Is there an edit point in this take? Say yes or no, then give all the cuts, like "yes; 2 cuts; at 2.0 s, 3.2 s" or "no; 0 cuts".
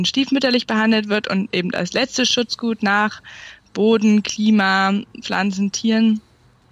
no; 0 cuts